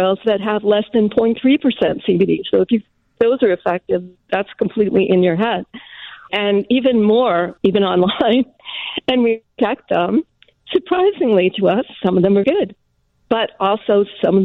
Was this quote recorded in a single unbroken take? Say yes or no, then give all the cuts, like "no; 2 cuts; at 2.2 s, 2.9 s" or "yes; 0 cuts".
no; 3 cuts; at 6.3 s, 7.6 s, 12.4 s